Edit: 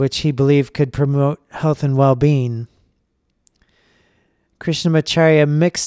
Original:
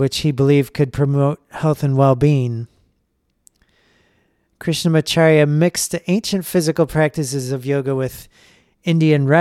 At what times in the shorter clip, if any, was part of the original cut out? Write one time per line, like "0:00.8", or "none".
none